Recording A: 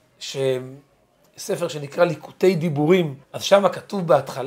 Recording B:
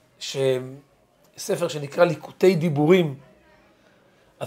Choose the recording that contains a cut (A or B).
A